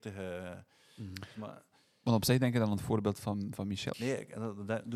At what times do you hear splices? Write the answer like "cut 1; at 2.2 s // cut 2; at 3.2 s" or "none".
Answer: cut 1; at 3.9 s